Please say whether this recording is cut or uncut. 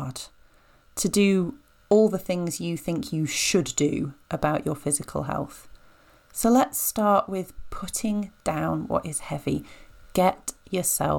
uncut